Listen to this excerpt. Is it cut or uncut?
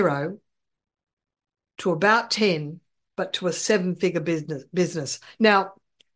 uncut